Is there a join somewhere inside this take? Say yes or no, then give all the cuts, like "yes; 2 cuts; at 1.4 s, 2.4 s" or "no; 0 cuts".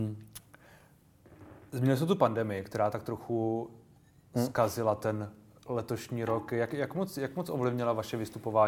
no; 0 cuts